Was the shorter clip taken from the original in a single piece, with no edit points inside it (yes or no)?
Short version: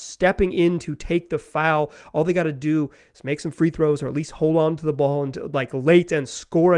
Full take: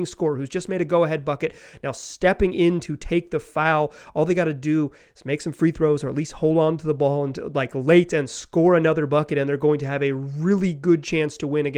yes